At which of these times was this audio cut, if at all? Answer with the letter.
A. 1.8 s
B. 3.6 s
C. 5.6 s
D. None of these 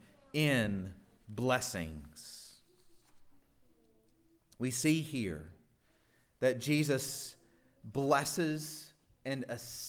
D